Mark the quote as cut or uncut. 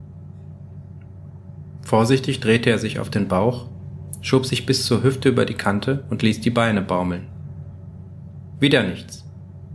uncut